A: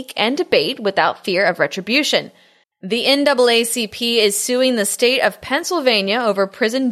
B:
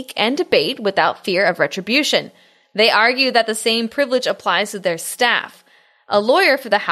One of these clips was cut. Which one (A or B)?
A